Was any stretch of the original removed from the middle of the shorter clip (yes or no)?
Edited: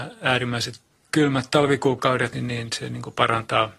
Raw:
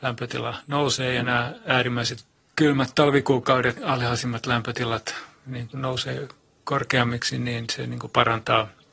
yes